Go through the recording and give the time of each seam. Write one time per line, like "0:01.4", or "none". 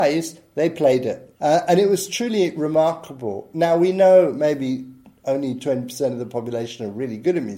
0:01.3